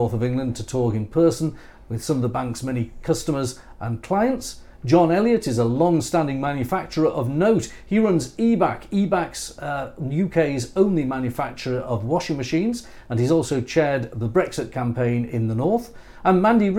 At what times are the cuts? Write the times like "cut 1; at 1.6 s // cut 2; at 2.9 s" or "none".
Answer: none